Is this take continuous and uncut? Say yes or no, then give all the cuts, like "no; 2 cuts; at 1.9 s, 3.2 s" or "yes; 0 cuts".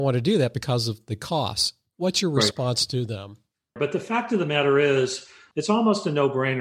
no; 2 cuts; at 3.8 s, 5.5 s